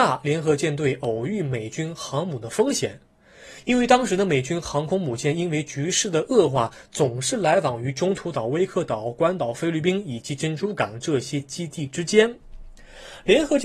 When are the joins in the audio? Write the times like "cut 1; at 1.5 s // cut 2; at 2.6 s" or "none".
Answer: none